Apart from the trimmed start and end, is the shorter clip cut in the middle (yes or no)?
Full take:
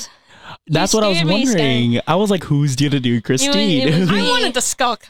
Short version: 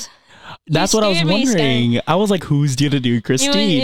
no